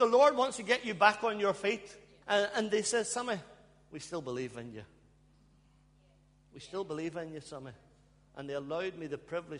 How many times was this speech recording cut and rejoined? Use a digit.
1